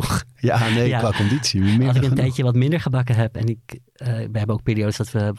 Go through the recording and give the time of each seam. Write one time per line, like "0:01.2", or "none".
none